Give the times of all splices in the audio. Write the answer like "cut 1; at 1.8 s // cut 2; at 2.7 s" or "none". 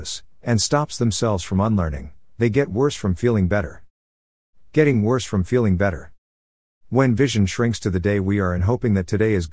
none